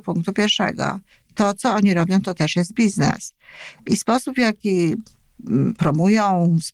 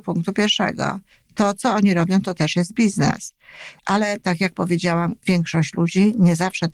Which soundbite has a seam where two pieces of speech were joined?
second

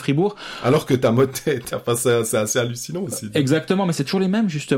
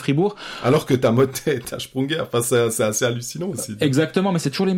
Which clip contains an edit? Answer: first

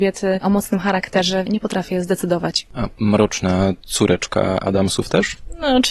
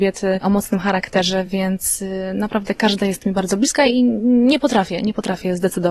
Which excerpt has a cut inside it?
first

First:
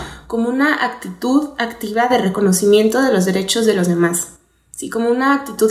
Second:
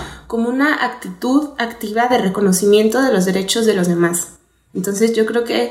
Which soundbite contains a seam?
second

